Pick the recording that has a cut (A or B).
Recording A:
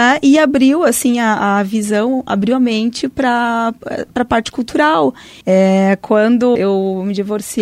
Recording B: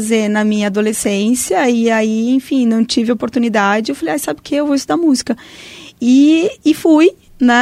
A